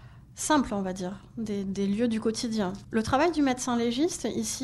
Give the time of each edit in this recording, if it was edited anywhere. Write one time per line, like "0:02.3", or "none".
0:02.8